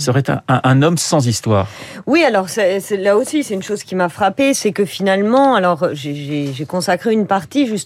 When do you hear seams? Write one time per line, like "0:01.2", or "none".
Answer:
none